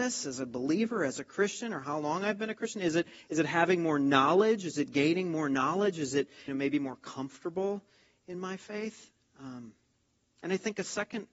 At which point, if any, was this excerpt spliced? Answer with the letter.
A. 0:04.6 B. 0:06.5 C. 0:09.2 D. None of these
B